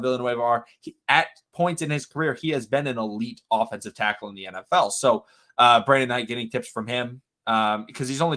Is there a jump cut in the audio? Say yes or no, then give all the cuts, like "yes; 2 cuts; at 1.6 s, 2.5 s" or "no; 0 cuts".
no; 0 cuts